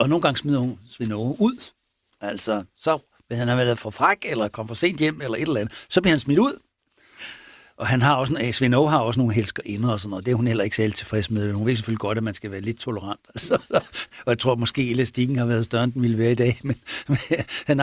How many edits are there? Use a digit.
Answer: 0